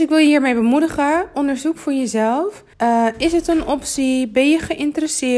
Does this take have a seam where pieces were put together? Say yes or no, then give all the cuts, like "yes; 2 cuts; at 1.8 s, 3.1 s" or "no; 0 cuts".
yes; 1 cut; at 2.7 s